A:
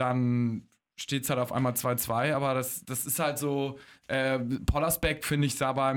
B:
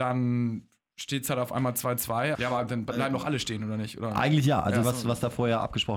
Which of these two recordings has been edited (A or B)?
B